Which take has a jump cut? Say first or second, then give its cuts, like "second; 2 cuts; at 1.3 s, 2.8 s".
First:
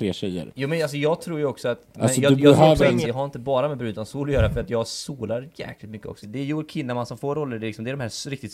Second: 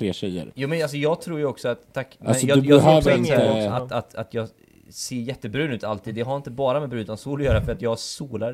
first; 3 cuts; at 1.9 s, 3.0 s, 6.2 s